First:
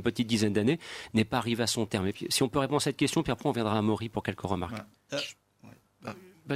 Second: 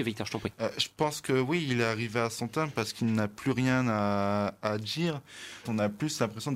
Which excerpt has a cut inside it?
second; 1 cut; at 5.6 s

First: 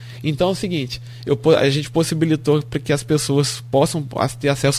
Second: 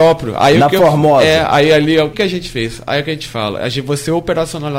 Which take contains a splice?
second; 1 cut; at 2.1 s

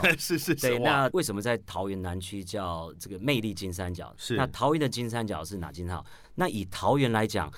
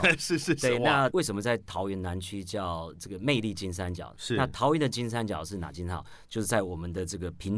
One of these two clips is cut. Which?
first; 1 cut; at 6.2 s

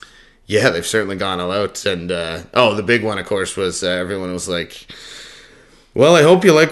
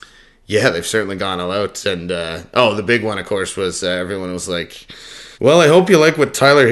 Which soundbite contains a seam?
second; 1 cut; at 5.3 s

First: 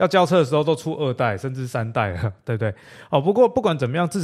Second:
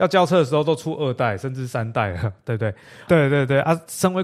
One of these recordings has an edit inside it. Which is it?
second; 1 cut; at 3.1 s

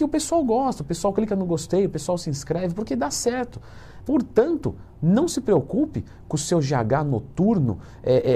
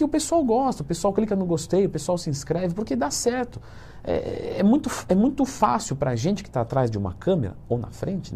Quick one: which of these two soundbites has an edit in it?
first; 1 cut; at 4.0 s

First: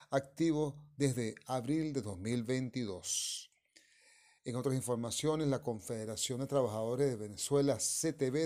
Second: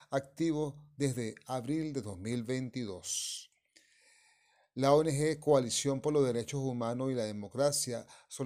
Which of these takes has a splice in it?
first; 1 cut; at 4.4 s

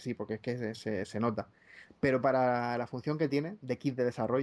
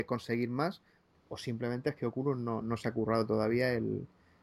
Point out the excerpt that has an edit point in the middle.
second; 1 cut; at 2.6 s

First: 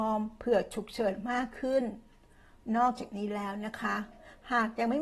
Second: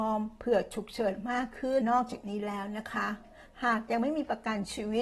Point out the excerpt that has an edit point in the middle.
second; 1 cut; at 1.8 s

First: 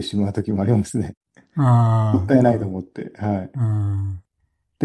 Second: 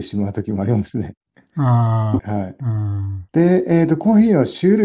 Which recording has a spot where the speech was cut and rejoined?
second; 2 cuts; at 2.2 s, 3.3 s

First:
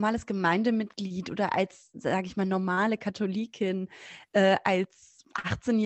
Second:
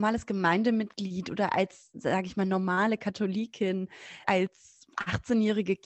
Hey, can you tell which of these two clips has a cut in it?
second; 1 cut; at 4.2 s

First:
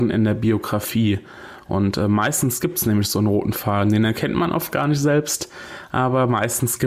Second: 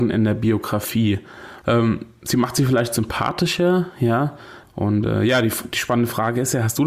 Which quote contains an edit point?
second; 2 cuts; at 1.6 s, 4.6 s

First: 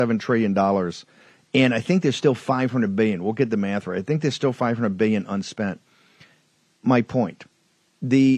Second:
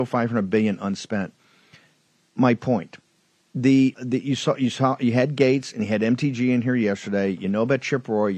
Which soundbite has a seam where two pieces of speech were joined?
second; 1 cut; at 3.9 s

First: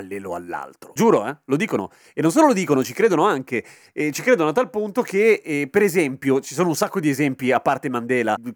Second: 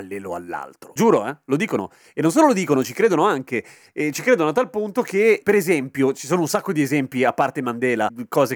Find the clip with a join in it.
second; 1 cut; at 5.4 s

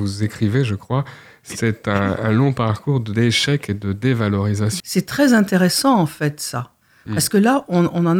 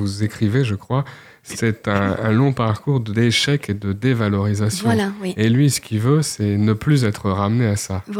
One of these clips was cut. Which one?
first; 1 cut; at 4.8 s

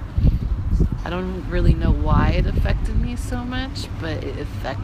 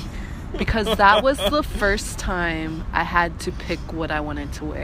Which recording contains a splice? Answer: first; 1 cut; at 1.0 s

